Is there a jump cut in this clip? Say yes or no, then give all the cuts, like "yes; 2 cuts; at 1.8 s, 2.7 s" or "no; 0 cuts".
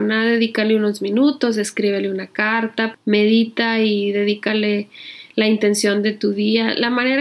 yes; 1 cut; at 2.9 s